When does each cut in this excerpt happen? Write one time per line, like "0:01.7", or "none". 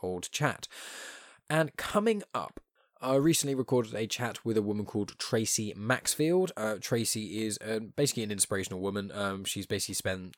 none